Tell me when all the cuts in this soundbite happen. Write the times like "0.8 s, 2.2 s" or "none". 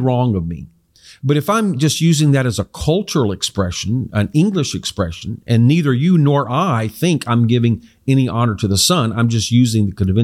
none